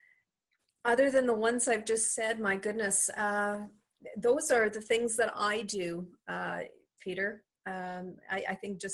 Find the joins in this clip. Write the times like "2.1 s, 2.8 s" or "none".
7.0 s